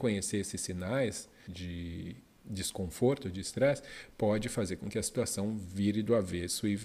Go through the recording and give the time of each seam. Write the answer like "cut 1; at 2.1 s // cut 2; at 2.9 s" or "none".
cut 1; at 1.5 s